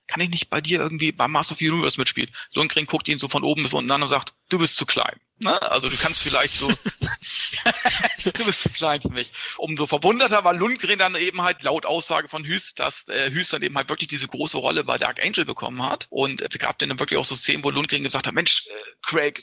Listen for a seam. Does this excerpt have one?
no; 0 cuts

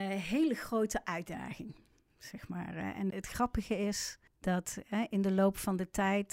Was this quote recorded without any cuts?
no; 2 cuts; at 3.1 s, 4.3 s

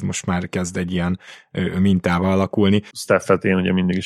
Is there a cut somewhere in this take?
yes; 1 cut; at 2.9 s

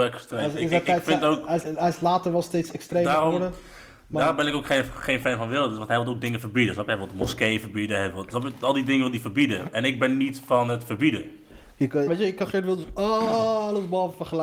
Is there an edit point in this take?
yes; 2 cuts; at 1.6 s, 12.1 s

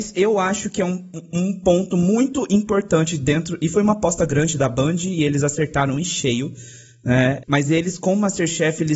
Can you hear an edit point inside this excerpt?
yes; 1 cut; at 7.4 s

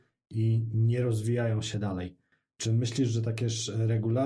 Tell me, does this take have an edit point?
no; 0 cuts

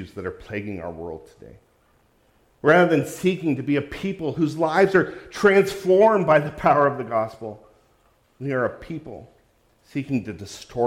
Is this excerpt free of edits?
yes; 0 cuts

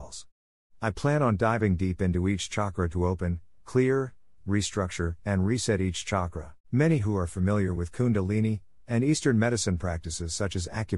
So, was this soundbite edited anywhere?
yes; 3 cuts; at 4.4 s, 6.6 s, 8.8 s

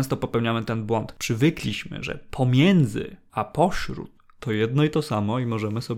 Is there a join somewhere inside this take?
no; 0 cuts

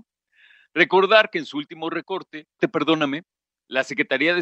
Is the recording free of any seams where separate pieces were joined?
no; 1 cut; at 2.6 s

